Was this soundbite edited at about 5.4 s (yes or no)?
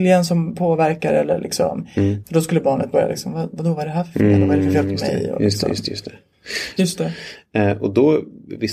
no